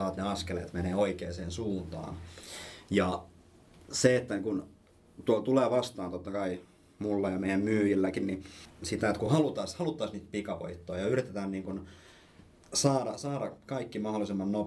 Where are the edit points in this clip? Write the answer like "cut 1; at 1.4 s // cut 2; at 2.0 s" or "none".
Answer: none

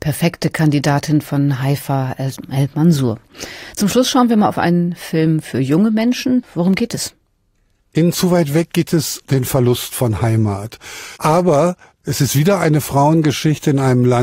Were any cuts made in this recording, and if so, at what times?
cut 1; at 6.4 s // cut 2; at 9.3 s // cut 3; at 11.2 s

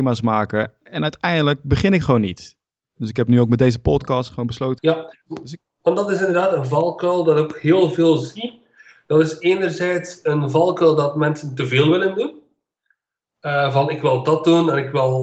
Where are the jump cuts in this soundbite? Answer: cut 1; at 4.8 s

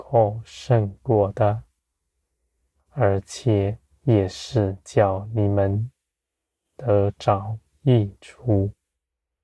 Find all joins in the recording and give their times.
none

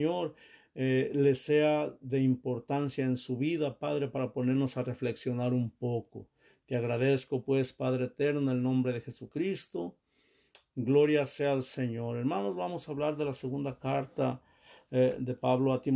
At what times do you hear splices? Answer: cut 1; at 10.7 s

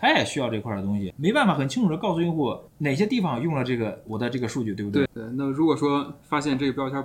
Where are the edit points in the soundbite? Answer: cut 1; at 1.1 s // cut 2; at 5.1 s

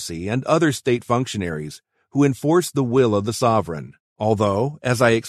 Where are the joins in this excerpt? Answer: cut 1; at 4.1 s

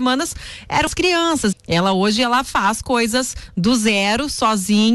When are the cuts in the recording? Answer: cut 1; at 1.5 s

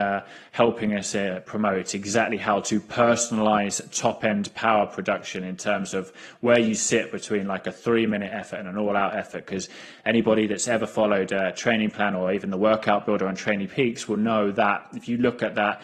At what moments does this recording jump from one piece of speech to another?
none

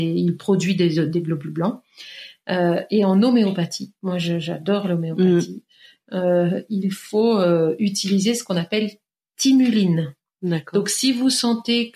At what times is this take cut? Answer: none

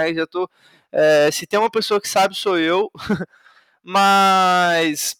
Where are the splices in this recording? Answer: none

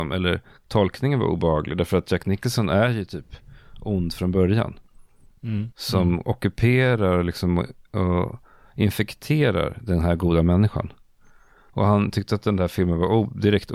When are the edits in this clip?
cut 1; at 5.7 s

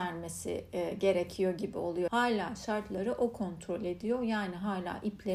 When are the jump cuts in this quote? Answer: cut 1; at 2.1 s

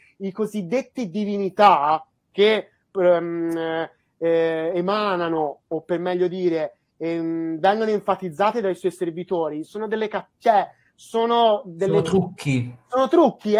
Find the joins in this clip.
none

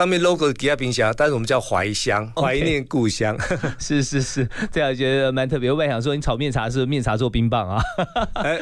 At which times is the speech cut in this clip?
cut 1; at 2.4 s

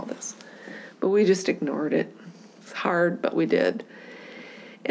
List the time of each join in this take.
none

